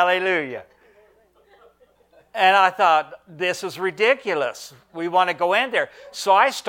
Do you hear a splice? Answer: no; 0 cuts

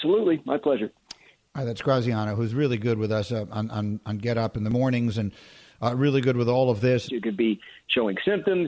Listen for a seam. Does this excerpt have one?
yes; 1 cut; at 7.1 s

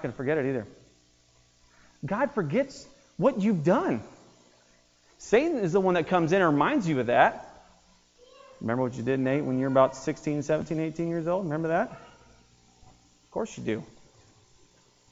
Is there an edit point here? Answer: no; 0 cuts

